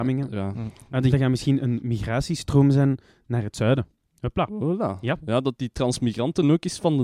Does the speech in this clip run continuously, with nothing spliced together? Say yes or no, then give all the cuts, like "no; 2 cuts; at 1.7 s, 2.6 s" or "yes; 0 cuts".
no; 1 cut; at 1.1 s